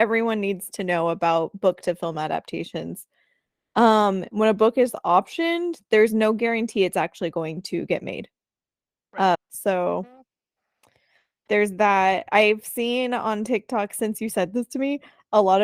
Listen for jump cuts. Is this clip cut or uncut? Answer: cut